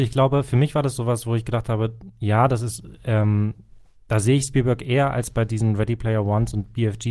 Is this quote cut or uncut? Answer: uncut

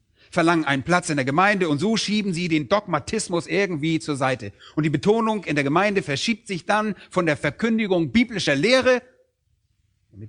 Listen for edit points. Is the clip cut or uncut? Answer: uncut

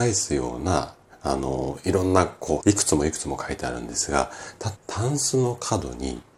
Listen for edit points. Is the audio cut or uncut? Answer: cut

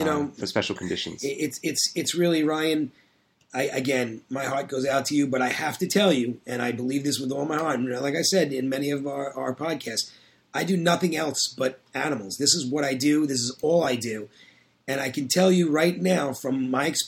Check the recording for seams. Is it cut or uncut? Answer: uncut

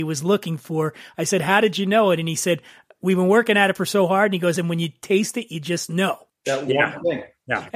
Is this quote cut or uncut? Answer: uncut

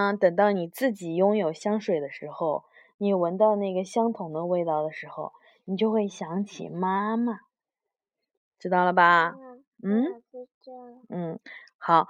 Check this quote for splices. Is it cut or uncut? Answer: uncut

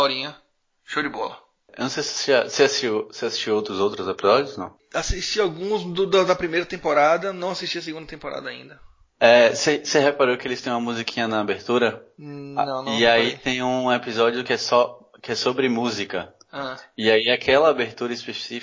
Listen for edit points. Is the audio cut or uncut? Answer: uncut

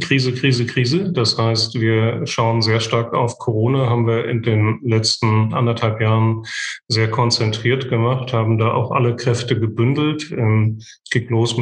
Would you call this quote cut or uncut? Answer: uncut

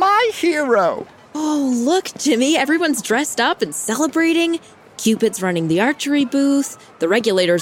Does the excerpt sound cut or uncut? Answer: uncut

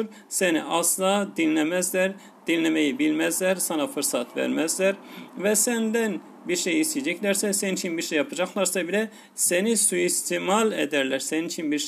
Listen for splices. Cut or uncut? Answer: uncut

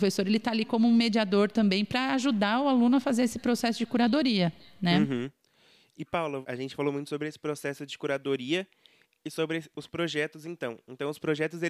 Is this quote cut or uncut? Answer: uncut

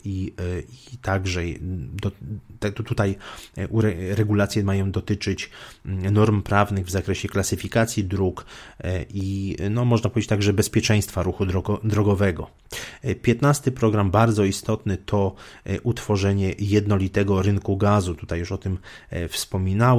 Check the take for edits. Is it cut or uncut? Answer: uncut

